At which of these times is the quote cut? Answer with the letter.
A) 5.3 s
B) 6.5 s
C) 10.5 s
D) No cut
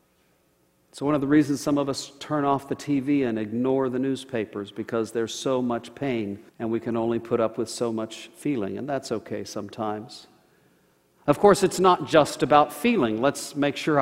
B